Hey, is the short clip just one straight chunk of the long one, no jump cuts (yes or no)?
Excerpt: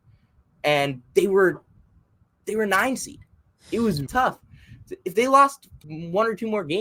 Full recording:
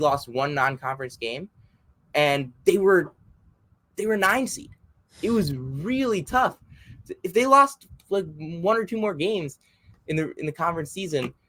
no